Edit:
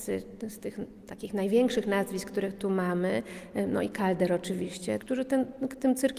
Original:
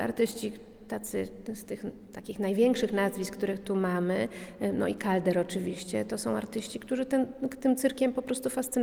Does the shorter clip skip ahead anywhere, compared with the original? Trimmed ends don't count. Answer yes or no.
yes